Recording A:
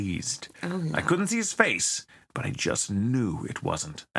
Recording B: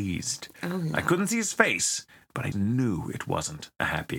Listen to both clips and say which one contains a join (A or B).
B